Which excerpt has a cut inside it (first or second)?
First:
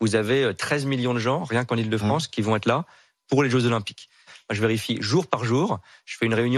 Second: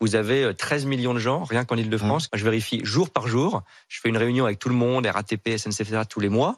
second